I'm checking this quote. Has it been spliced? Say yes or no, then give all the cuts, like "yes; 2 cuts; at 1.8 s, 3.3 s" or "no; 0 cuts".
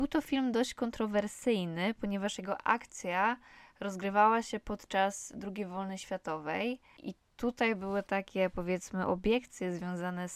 no; 0 cuts